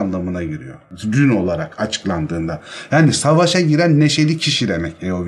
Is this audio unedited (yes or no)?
yes